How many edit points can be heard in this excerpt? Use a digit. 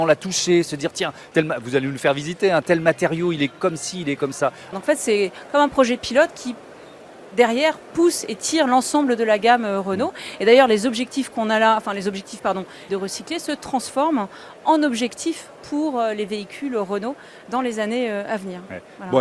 2